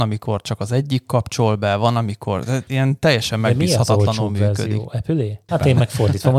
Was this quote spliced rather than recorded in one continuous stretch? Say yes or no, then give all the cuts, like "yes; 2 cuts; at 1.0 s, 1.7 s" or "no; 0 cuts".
yes; 1 cut; at 5.5 s